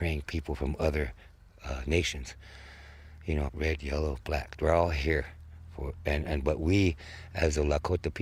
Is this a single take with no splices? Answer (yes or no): no